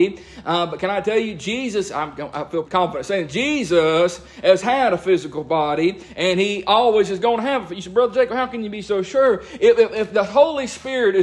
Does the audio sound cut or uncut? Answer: cut